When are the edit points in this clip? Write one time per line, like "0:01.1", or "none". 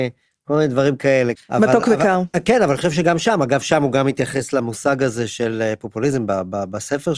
0:01.3